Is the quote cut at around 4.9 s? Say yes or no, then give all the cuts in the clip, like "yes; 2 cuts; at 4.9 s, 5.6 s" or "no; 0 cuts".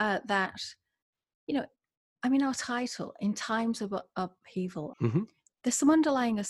yes; 1 cut; at 4.9 s